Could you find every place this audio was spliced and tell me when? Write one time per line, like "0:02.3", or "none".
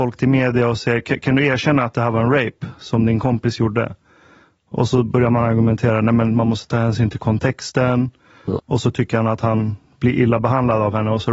0:08.6